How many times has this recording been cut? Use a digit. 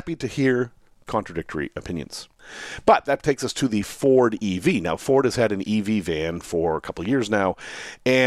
0